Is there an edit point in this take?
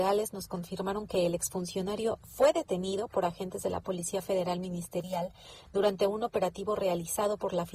no; 0 cuts

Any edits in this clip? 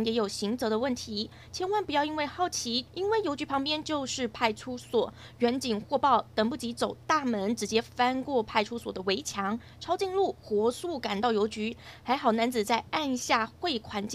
yes; 1 cut; at 2.9 s

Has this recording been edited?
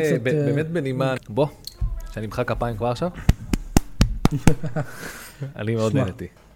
yes; 1 cut; at 1.2 s

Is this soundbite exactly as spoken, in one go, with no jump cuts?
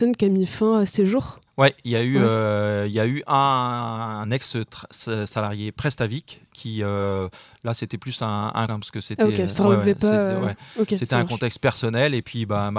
no; 2 cuts; at 1.5 s, 8.7 s

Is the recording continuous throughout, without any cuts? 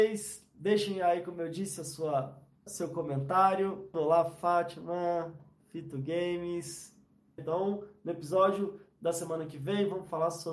no; 3 cuts; at 2.7 s, 3.9 s, 7.4 s

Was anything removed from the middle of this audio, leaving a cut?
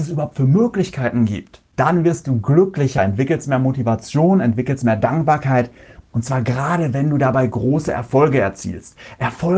no; 0 cuts

